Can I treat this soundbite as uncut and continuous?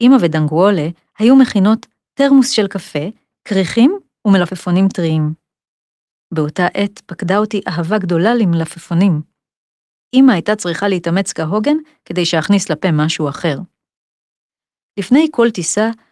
yes; 0 cuts

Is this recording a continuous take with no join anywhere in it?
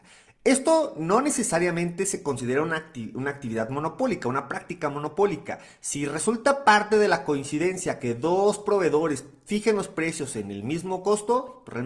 yes; 0 cuts

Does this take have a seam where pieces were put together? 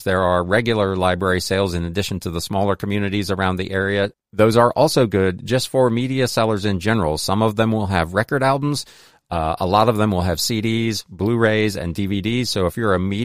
yes; 1 cut; at 4.1 s

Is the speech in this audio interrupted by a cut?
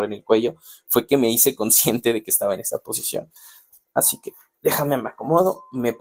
no; 0 cuts

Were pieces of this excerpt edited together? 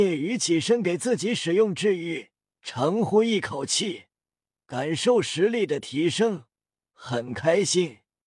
yes; 1 cut; at 2.5 s

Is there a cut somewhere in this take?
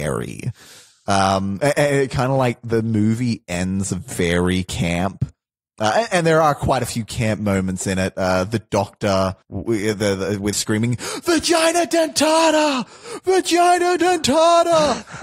yes; 2 cuts; at 9.4 s, 10.5 s

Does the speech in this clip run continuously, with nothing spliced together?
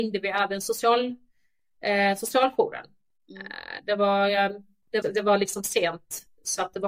no; 1 cut; at 5.0 s

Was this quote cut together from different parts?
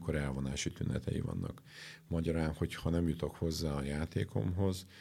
no; 0 cuts

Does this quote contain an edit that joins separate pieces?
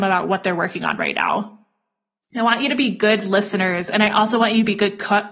yes; 1 cut; at 2.2 s

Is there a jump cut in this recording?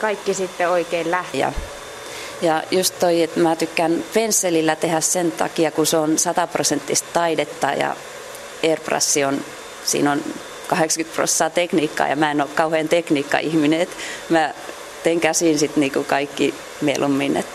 yes; 1 cut; at 1.3 s

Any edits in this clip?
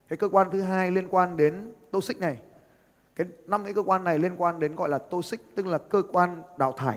no; 0 cuts

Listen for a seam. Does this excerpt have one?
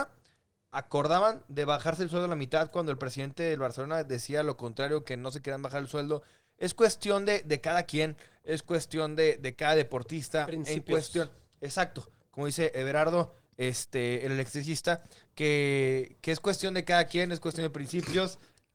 no; 0 cuts

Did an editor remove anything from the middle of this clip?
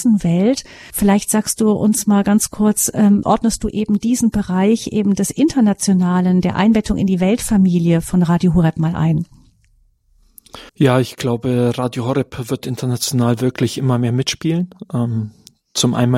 yes; 3 cuts; at 0.9 s, 3.2 s, 10.7 s

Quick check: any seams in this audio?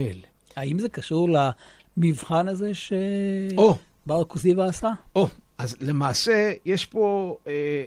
no; 0 cuts

